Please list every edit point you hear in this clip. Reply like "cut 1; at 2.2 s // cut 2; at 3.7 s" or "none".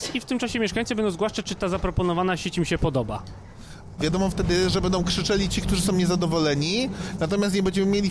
cut 1; at 4.0 s